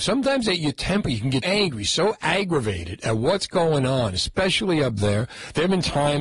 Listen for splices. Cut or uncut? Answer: cut